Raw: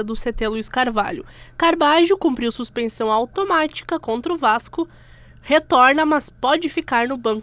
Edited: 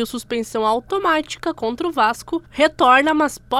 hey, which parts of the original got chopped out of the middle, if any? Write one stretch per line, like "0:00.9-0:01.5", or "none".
0:04.9-0:05.4

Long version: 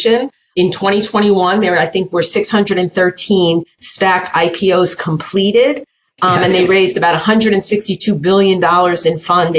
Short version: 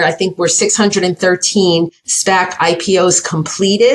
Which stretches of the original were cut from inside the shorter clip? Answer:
none

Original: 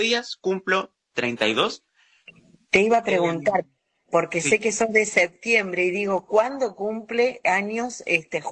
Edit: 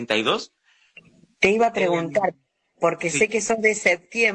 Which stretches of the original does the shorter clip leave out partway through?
none

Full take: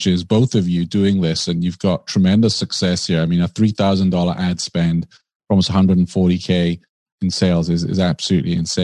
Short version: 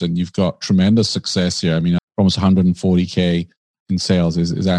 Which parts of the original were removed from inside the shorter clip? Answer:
0:03.4-0:05.3

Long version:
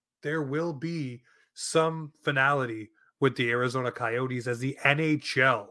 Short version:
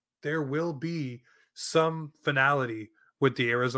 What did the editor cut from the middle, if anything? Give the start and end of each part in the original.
none

